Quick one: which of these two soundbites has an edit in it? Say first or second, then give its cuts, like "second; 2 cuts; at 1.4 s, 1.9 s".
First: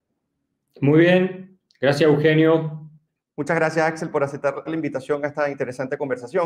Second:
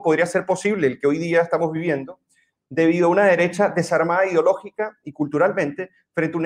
first; 2 cuts; at 3.2 s, 4.7 s